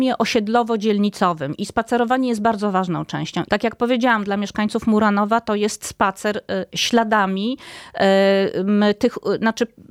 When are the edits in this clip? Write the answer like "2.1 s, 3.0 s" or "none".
3.4 s